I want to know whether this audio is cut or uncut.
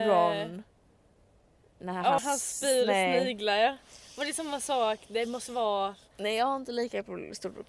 cut